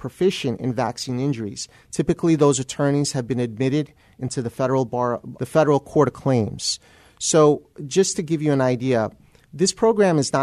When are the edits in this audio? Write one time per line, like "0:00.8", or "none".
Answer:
0:05.4